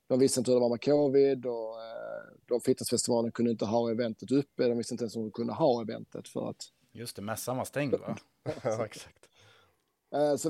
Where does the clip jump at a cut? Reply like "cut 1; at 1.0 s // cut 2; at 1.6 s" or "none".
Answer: cut 1; at 8.4 s